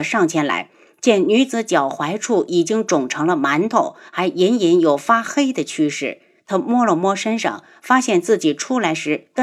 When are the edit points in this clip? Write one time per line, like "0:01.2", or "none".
none